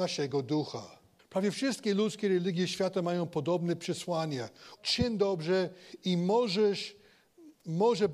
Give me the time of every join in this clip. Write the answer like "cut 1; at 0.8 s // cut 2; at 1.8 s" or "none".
cut 1; at 1.2 s // cut 2; at 4.8 s